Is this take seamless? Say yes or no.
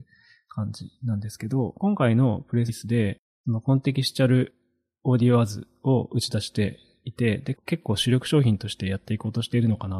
no